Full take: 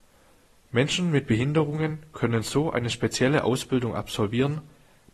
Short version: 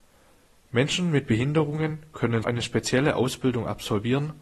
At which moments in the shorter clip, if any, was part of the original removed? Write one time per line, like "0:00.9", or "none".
0:02.4

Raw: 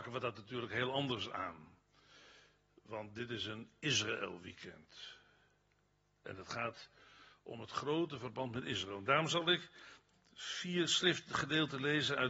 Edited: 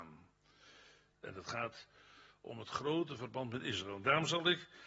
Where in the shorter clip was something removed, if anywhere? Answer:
0:01.1

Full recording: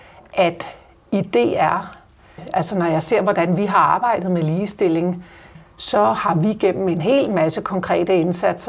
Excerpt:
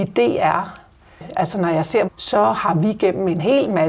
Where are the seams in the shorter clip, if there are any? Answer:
0:02.1

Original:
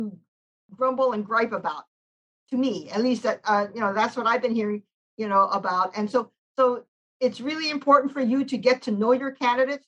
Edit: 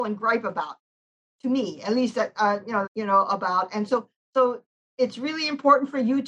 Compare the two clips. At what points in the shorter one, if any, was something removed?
0:02.9

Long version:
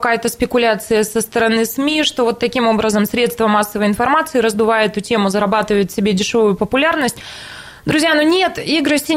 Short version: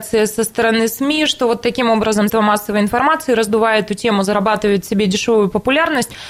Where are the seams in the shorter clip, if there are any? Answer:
0:02.3

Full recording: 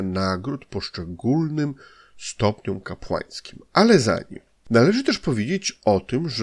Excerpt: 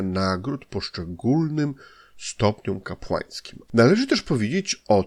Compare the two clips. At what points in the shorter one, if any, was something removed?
0:03.7

